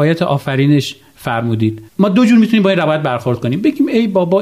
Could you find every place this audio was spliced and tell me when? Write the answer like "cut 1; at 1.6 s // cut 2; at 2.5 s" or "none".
cut 1; at 1.9 s

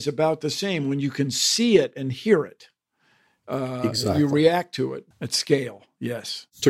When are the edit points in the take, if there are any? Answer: cut 1; at 5.1 s

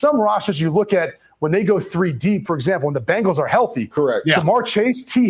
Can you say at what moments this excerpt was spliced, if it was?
cut 1; at 2.5 s

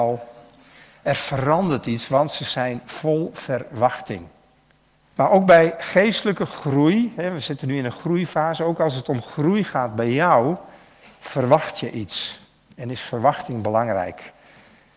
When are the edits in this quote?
cut 1; at 5.1 s

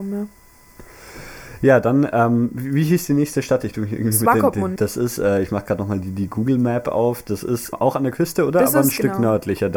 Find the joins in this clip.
cut 1; at 4.8 s // cut 2; at 7.7 s

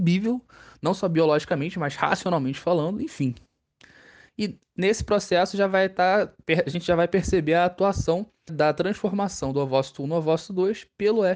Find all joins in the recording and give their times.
cut 1; at 8.5 s

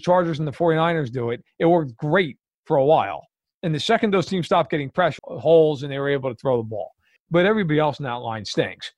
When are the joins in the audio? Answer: cut 1; at 5.2 s // cut 2; at 7.2 s

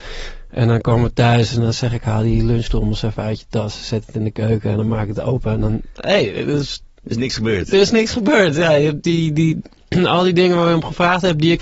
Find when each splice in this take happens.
none

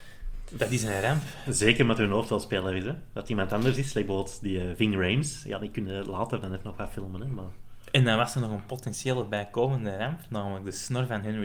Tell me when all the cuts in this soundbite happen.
none

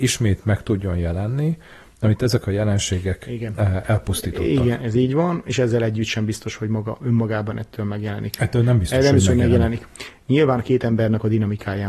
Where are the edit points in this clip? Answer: none

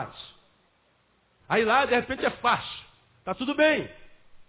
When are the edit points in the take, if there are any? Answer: cut 1; at 1.4 s

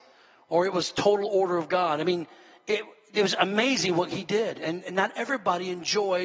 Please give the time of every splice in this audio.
none

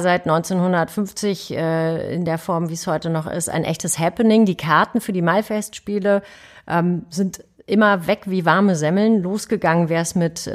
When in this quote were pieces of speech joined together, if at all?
none

